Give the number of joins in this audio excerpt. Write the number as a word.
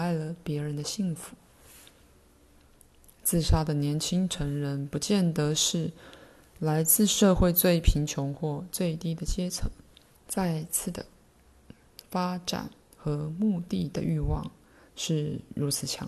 two